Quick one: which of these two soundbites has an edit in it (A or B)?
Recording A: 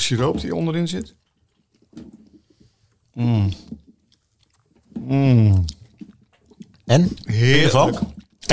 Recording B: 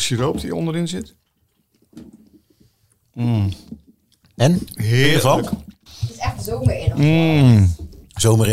B